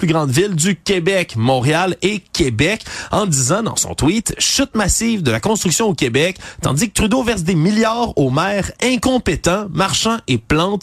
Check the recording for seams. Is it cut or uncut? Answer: uncut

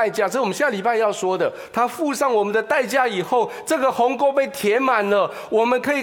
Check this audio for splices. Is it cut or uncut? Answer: uncut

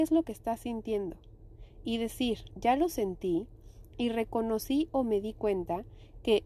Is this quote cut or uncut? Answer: cut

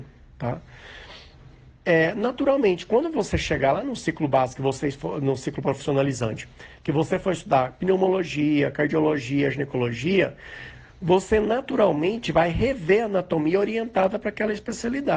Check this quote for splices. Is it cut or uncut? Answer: uncut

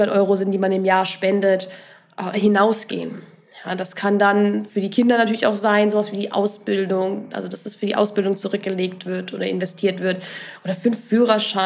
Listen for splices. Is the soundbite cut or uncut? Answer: uncut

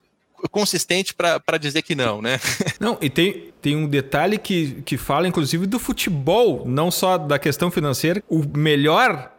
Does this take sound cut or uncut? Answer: cut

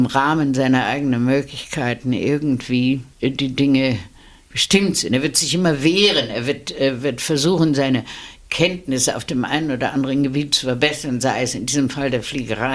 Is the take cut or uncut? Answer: cut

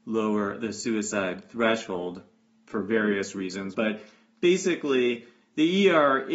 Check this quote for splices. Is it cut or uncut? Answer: cut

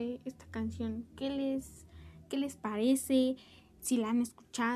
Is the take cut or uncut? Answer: uncut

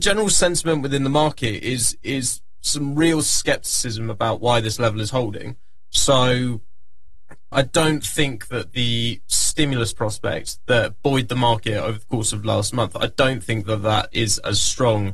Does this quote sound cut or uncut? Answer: cut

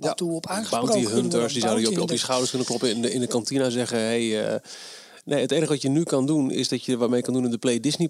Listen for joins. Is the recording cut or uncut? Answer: uncut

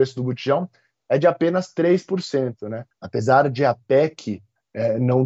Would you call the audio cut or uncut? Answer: cut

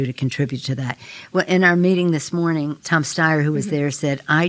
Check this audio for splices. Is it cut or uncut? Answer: uncut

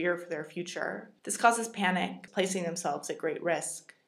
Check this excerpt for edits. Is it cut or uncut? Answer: cut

